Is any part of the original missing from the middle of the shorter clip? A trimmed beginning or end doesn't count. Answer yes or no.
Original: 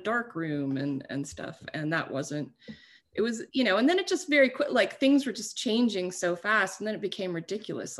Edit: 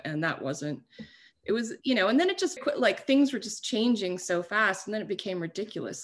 yes